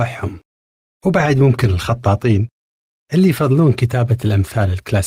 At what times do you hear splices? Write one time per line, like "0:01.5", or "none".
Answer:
none